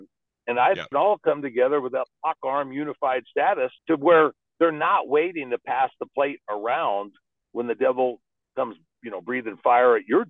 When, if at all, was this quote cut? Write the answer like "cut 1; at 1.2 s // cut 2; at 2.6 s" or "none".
cut 1; at 0.9 s // cut 2; at 3.8 s